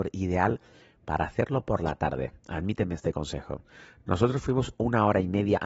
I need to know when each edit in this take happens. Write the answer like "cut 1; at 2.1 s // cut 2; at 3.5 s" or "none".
none